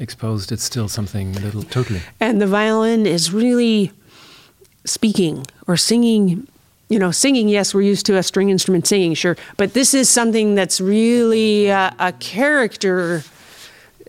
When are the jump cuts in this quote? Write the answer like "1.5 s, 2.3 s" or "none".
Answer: 1.6 s

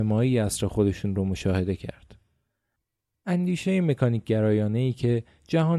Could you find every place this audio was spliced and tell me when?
none

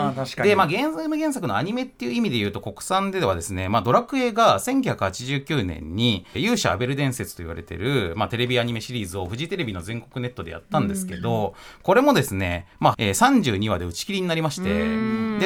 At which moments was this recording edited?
6.3 s, 12.9 s

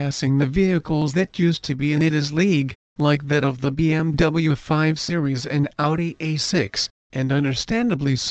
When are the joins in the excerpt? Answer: none

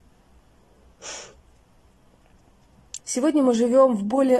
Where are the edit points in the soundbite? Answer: 3.0 s

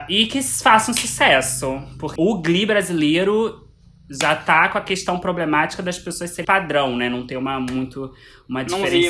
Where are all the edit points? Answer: 2.2 s, 6.4 s

